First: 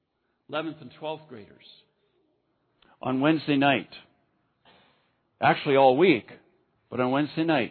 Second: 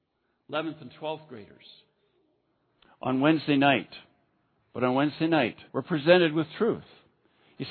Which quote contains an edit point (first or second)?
second